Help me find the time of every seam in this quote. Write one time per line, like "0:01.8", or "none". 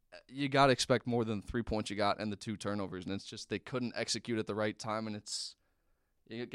none

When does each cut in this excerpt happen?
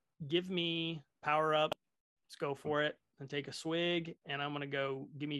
0:01.1

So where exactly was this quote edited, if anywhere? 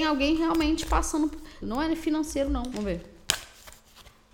0:01.6
0:02.7

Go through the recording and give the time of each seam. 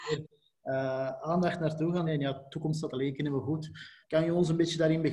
0:02.1
0:04.0

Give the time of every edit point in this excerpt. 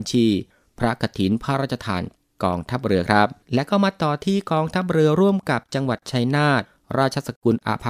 0:03.4

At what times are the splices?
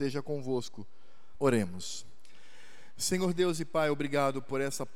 0:01.3

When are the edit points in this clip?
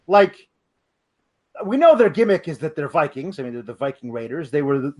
none

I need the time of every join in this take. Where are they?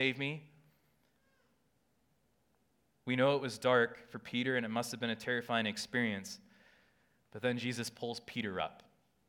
none

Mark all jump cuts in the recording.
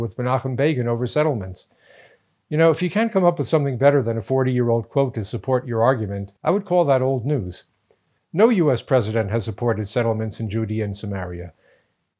0:06.4

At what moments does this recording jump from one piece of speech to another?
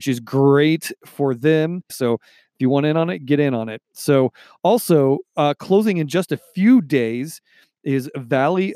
0:01.9

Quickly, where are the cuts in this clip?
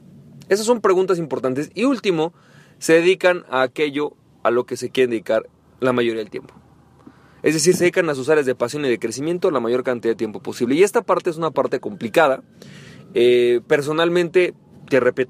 none

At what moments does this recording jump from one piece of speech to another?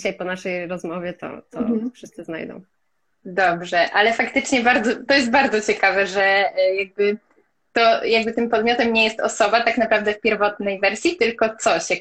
0:05.1

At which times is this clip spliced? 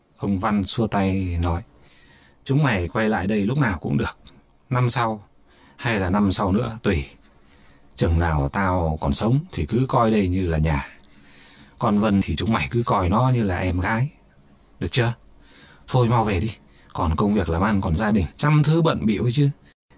0:12.2
0:18.3

